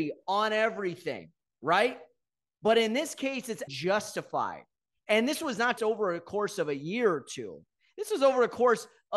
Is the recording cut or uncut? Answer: cut